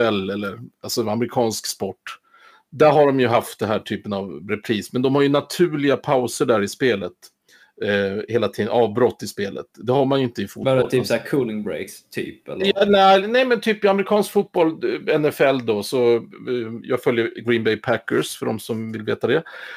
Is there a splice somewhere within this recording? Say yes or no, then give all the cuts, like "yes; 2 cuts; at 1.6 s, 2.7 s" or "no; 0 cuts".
no; 0 cuts